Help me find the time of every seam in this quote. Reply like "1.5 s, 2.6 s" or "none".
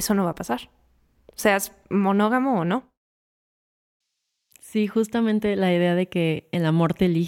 none